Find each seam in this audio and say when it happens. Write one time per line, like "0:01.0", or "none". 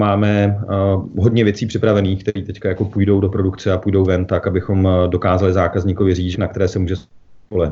0:06.3